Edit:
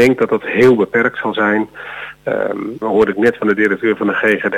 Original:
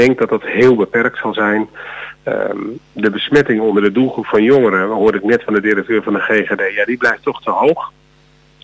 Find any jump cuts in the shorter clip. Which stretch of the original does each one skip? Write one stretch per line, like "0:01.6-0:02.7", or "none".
0:02.8-0:04.9